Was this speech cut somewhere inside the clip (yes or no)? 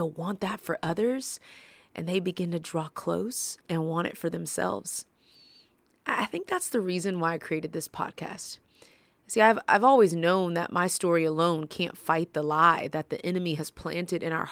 yes